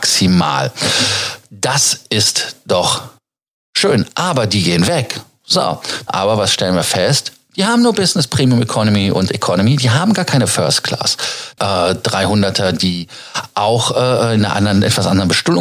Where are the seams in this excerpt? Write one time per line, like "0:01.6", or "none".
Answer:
0:06.1
0:11.6